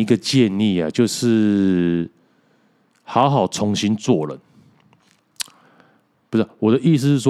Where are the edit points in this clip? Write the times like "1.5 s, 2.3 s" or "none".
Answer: none

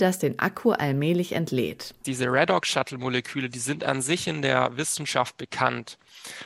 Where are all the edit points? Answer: 2.0 s

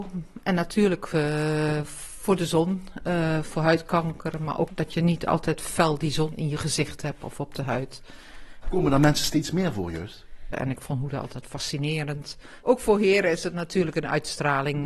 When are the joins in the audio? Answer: 8.6 s, 10.5 s, 12.6 s

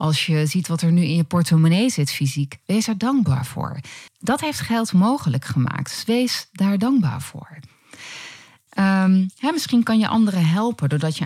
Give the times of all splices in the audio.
4.1 s, 8.7 s

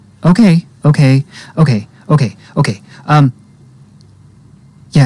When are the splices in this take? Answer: none

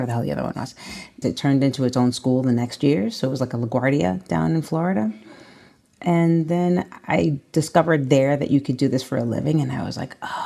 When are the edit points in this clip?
1.2 s

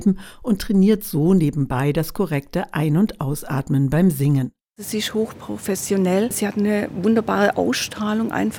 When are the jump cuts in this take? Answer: none

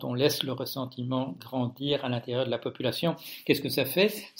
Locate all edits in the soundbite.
none

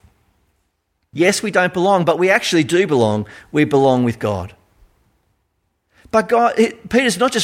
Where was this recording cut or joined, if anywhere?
1.1 s

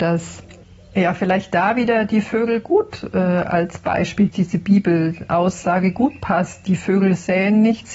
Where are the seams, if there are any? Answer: 4.3 s

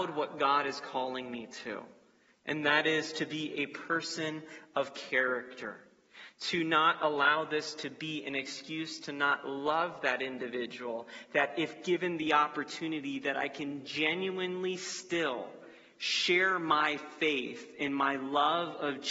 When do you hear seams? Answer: none

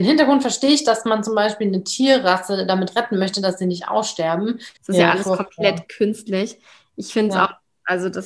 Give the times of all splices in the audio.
4.8 s

